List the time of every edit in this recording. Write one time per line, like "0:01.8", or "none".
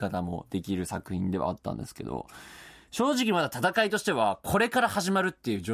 none